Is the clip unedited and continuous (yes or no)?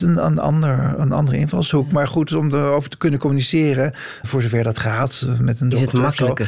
no